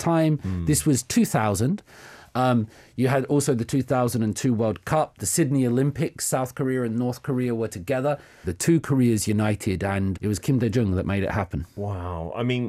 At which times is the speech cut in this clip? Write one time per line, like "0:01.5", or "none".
0:08.4
0:10.1